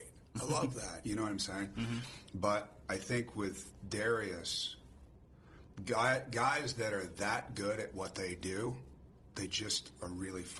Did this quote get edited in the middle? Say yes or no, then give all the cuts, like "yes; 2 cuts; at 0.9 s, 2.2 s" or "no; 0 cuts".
no; 0 cuts